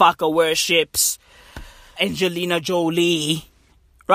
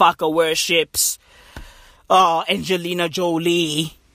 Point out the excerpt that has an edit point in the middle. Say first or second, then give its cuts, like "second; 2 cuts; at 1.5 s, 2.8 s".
first; 1 cut; at 2.0 s